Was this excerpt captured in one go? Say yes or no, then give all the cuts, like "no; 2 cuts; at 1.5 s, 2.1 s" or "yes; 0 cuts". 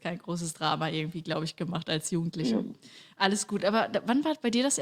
yes; 0 cuts